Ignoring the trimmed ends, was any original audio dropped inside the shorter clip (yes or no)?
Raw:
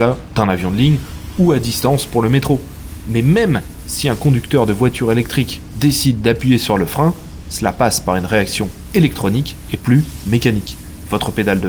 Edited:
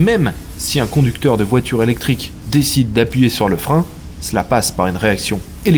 no